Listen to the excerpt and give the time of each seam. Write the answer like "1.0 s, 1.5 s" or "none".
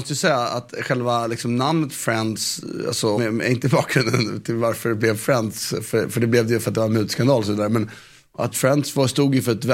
3.2 s, 8.5 s